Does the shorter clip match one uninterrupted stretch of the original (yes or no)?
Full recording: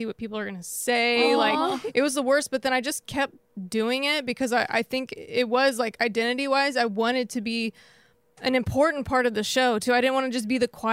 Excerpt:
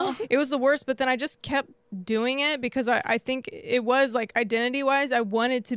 yes